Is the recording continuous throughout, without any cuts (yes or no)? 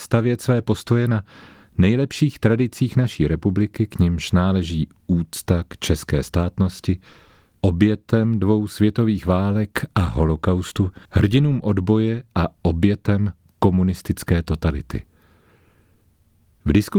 no